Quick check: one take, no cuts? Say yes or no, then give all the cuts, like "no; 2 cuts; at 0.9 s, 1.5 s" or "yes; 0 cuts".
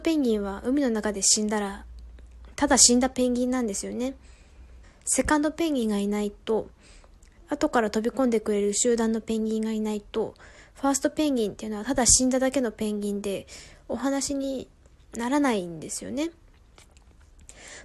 yes; 0 cuts